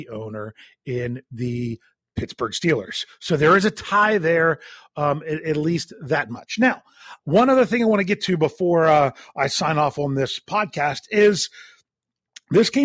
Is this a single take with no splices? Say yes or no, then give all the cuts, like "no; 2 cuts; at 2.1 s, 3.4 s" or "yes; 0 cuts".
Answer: yes; 0 cuts